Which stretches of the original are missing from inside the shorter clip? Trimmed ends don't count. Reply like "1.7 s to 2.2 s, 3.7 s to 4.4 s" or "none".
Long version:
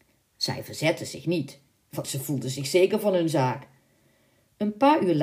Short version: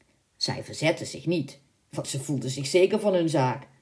none